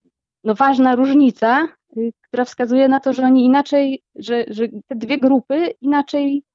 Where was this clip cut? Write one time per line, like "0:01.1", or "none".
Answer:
none